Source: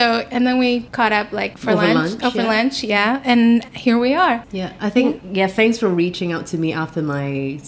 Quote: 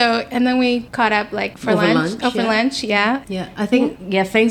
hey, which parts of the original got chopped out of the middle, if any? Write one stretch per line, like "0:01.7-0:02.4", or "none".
0:03.2-0:04.5